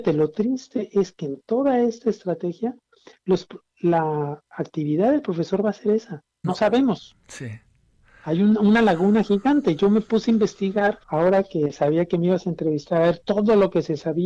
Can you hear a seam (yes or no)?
yes